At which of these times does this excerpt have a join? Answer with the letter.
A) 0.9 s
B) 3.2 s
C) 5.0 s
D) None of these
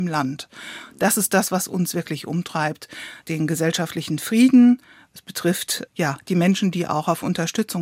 B